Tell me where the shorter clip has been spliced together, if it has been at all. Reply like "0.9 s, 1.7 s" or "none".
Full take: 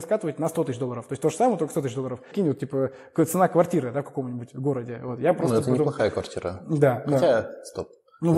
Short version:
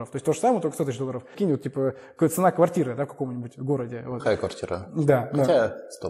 4.2 s